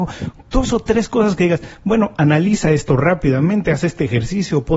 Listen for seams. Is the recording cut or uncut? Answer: uncut